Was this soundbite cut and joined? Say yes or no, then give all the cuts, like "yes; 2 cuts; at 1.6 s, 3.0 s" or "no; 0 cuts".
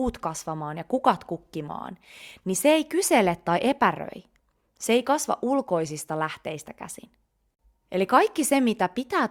no; 0 cuts